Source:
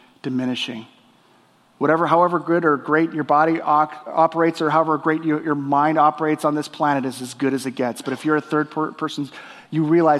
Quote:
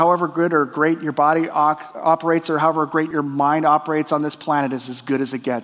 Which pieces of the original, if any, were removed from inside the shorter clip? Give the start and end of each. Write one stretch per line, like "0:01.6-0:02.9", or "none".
0:05.2-0:05.4